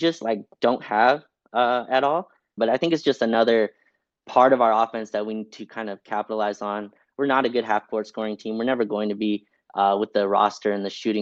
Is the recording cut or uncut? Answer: cut